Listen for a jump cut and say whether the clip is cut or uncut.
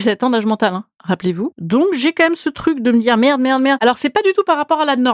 uncut